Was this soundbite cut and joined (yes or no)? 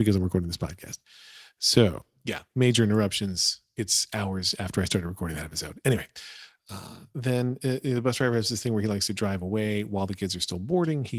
no